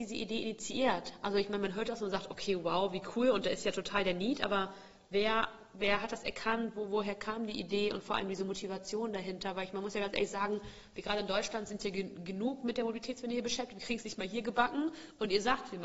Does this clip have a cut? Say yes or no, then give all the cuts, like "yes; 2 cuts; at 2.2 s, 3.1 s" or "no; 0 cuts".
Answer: no; 0 cuts